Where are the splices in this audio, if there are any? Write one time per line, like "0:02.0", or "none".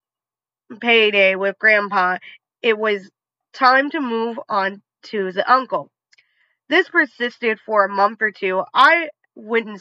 none